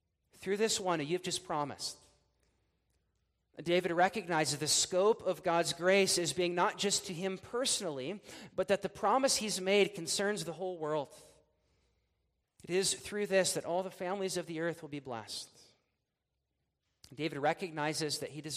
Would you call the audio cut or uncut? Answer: cut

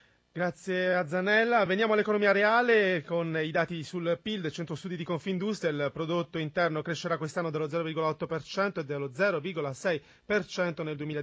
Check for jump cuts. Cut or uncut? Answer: uncut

